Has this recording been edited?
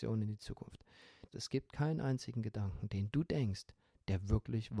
yes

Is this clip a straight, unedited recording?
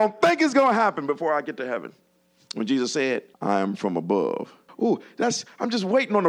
no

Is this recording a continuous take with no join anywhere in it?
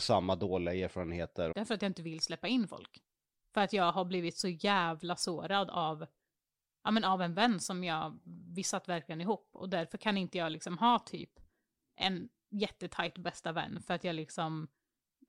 no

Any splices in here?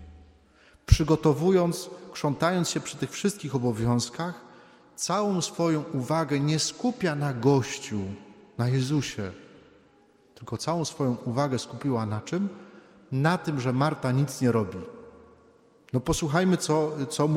no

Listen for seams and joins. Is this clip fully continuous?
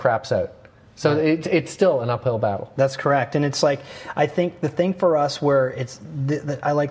yes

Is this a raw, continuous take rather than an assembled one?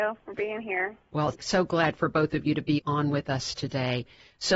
no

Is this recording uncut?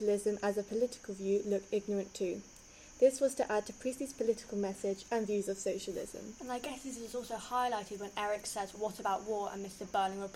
no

